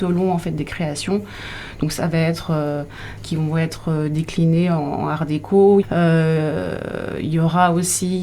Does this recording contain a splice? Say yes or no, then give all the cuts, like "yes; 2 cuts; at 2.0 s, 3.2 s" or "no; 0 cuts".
yes; 2 cuts; at 3.2 s, 5.8 s